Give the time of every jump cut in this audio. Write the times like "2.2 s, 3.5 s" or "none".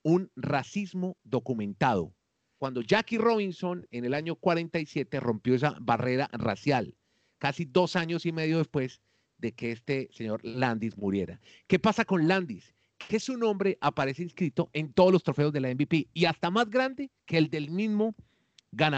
2.6 s, 17.2 s